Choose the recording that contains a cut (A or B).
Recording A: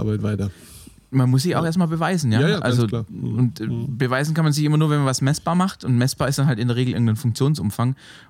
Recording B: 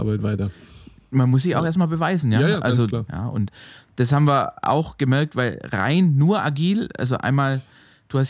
B